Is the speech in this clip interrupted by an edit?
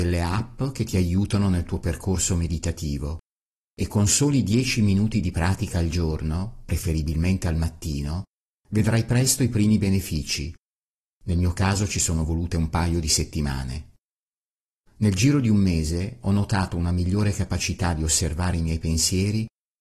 no; 0 cuts

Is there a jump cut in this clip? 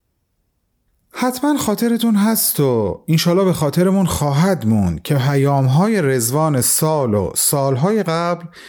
no; 0 cuts

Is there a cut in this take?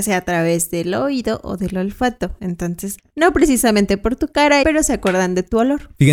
yes; 2 cuts; at 3.0 s, 4.6 s

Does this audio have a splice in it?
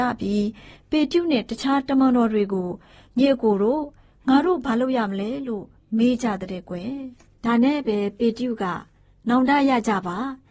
no; 0 cuts

